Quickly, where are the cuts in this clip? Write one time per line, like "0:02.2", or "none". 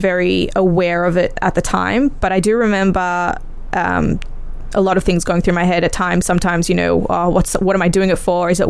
none